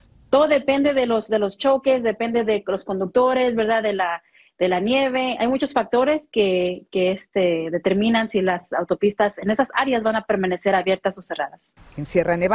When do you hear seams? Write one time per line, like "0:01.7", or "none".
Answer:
none